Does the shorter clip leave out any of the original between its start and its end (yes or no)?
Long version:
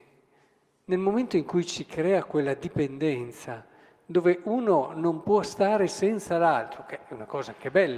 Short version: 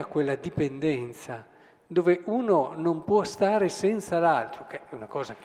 no